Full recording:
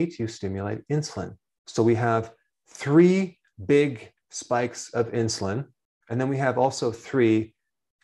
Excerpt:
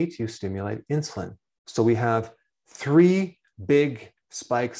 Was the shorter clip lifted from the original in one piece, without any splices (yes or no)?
yes